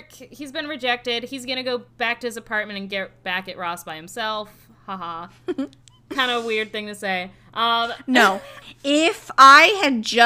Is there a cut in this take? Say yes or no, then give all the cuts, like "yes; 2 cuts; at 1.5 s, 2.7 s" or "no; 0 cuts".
yes; 2 cuts; at 1.9 s, 8.6 s